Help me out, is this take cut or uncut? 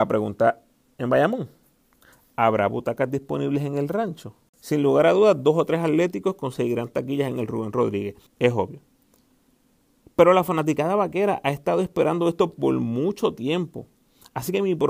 cut